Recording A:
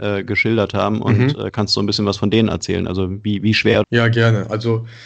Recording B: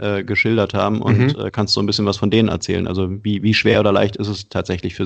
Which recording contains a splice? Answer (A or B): A